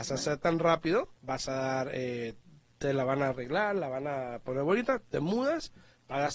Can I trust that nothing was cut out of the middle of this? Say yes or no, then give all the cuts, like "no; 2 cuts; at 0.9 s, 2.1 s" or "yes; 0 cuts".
no; 1 cut; at 1.2 s